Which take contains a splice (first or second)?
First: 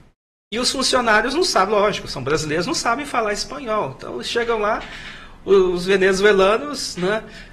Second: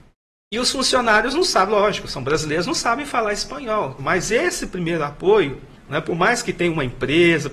second